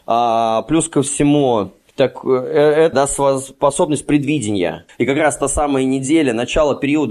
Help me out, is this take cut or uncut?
cut